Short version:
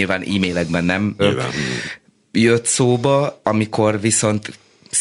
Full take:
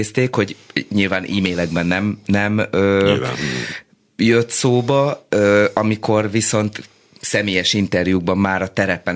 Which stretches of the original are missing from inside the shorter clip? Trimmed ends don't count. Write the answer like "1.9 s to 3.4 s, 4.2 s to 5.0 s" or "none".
2.2 s to 3.0 s, 5.3 s to 5.7 s